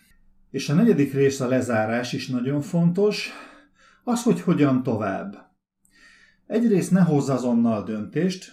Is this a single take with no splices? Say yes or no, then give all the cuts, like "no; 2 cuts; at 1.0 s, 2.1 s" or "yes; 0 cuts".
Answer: yes; 0 cuts